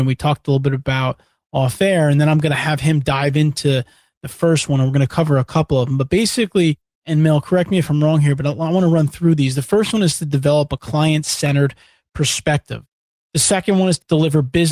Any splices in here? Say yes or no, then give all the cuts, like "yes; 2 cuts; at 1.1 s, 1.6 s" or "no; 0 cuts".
no; 0 cuts